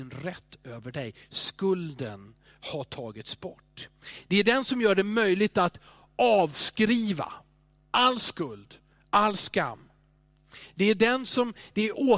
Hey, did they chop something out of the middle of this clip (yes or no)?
no